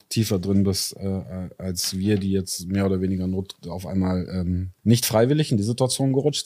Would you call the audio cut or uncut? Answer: cut